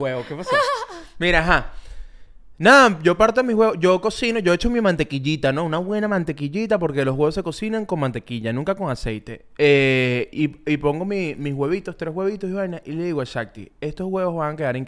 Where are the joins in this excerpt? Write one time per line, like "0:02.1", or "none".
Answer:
none